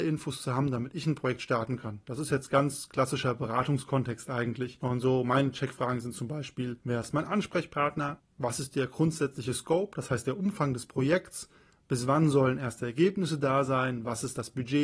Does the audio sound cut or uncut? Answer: cut